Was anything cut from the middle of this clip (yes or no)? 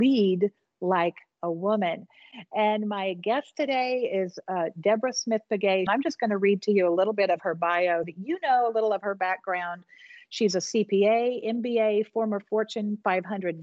yes